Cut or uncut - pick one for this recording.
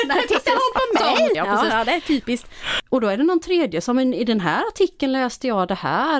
cut